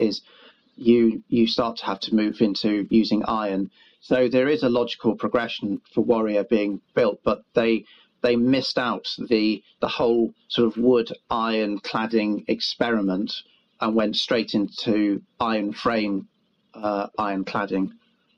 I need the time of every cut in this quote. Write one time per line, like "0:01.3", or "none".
none